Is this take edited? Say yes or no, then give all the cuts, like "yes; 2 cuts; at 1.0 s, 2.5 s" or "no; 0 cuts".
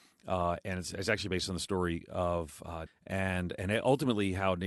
yes; 1 cut; at 2.9 s